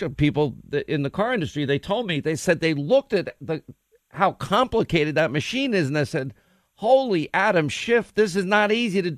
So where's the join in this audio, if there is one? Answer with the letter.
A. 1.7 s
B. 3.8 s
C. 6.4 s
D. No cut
D